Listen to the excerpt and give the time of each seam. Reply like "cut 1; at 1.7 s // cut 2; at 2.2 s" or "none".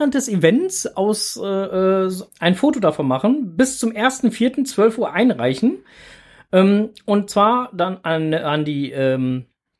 cut 1; at 2.3 s